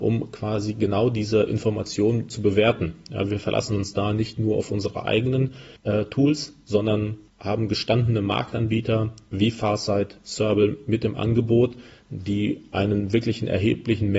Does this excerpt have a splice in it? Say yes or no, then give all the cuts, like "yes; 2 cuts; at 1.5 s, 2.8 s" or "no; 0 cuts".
no; 0 cuts